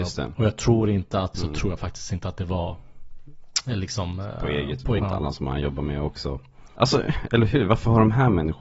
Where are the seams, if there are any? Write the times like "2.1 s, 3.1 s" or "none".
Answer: 1.3 s, 5.0 s, 6.8 s